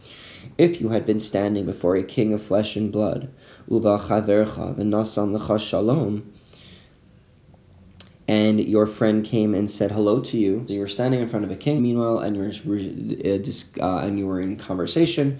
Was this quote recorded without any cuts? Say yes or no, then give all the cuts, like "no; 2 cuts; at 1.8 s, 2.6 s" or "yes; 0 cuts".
no; 2 cuts; at 10.7 s, 11.8 s